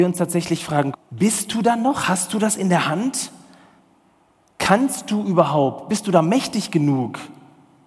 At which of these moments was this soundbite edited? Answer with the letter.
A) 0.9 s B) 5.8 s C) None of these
A